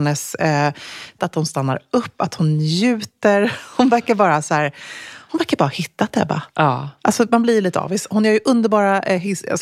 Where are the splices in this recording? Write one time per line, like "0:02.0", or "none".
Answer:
0:01.2